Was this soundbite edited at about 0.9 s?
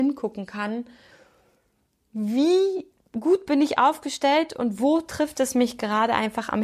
no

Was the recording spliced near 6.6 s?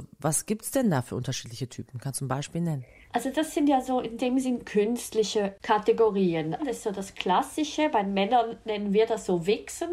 yes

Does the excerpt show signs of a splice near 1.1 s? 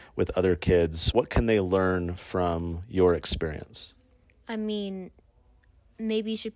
yes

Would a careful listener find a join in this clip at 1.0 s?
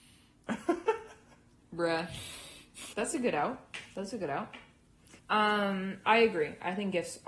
no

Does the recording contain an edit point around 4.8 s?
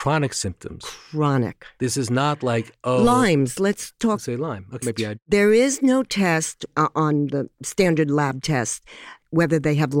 yes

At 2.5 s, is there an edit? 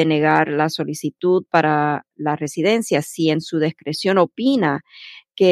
no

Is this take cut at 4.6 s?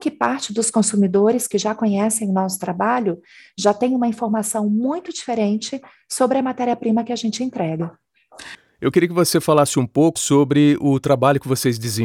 no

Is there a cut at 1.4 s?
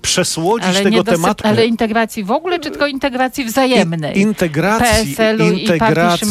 yes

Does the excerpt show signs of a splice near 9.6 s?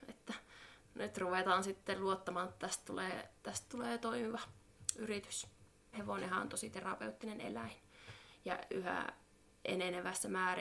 no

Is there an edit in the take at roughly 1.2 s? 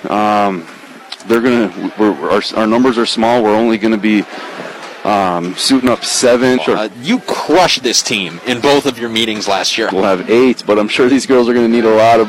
no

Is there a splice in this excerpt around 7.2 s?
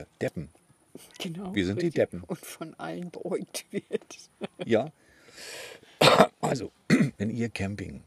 yes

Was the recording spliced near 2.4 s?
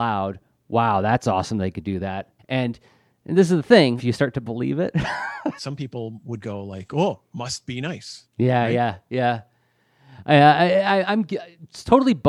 yes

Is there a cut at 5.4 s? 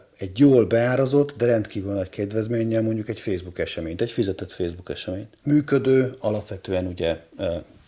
yes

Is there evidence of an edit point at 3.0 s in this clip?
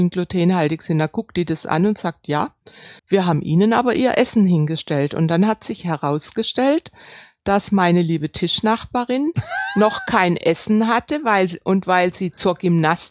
yes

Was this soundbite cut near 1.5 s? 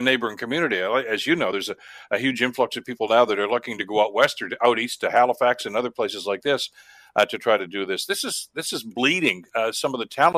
no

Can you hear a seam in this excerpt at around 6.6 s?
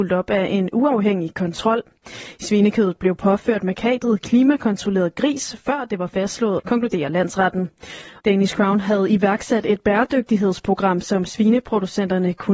yes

